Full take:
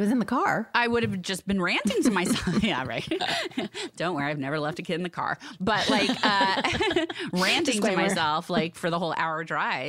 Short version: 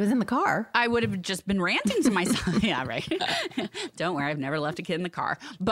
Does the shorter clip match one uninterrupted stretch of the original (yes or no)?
yes